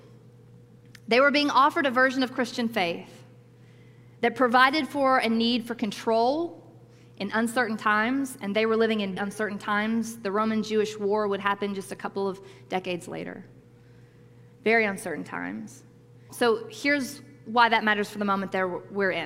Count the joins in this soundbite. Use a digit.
2